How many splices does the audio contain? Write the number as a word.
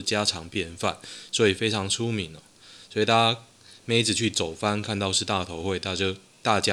zero